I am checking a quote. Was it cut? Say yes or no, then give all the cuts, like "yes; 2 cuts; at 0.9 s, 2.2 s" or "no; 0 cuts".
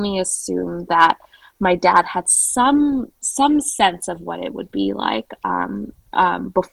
no; 0 cuts